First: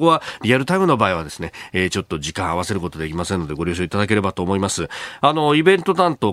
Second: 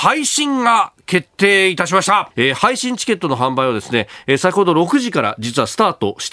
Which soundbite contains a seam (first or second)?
second